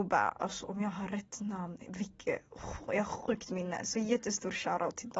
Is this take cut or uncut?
uncut